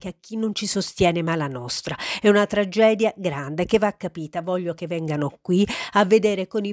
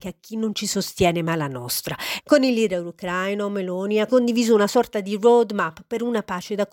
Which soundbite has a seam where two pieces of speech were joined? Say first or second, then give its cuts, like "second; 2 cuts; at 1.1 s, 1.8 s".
second; 2 cuts; at 2.2 s, 4.1 s